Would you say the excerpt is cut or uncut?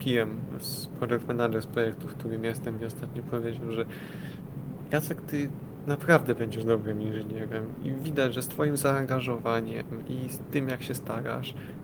uncut